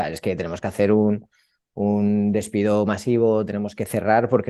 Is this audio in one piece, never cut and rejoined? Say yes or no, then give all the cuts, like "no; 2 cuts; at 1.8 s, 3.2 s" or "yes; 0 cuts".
yes; 0 cuts